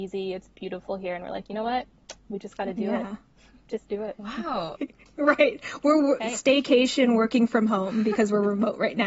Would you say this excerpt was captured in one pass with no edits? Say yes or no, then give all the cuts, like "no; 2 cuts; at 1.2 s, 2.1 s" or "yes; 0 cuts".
no; 1 cut; at 4.7 s